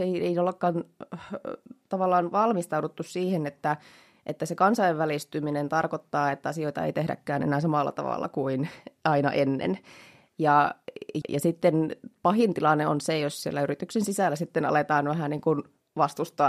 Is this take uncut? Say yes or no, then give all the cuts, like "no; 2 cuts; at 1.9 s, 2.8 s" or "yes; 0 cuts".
no; 1 cut; at 11.2 s